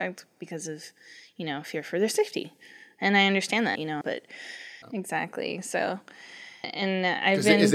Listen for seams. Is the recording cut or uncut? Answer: cut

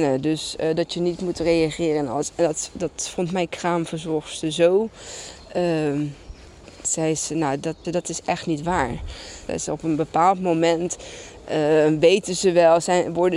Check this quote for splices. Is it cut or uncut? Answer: cut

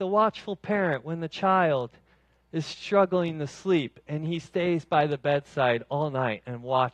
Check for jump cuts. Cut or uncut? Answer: uncut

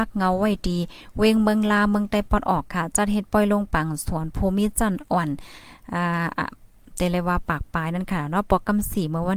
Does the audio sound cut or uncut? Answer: uncut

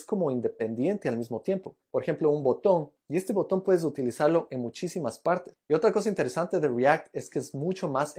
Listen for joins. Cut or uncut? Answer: cut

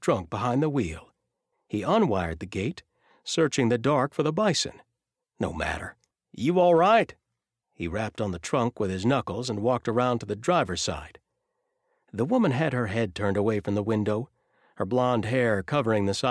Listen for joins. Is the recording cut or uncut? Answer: cut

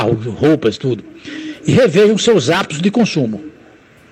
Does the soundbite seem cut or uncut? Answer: uncut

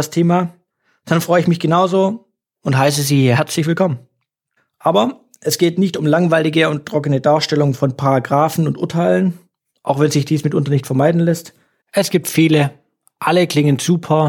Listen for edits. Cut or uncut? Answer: cut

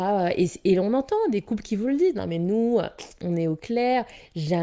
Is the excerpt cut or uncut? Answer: uncut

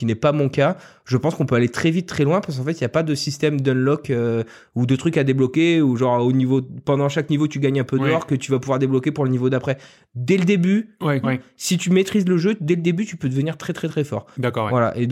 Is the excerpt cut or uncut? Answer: cut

